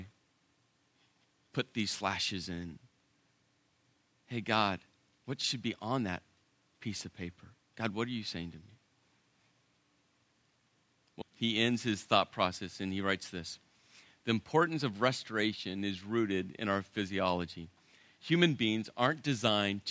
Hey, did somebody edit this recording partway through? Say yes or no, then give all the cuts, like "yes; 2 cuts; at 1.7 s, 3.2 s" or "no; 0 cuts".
yes; 1 cut; at 11.2 s